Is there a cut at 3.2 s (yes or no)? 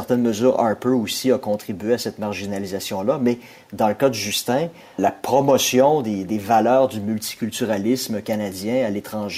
no